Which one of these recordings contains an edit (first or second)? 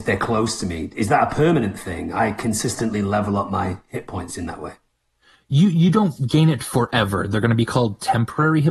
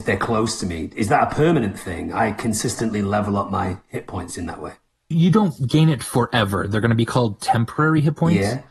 second